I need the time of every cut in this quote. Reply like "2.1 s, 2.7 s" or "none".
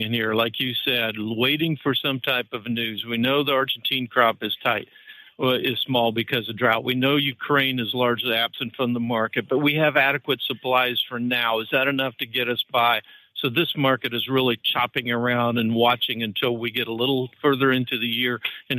none